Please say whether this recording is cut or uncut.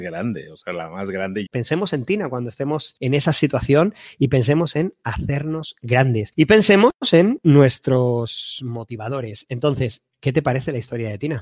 cut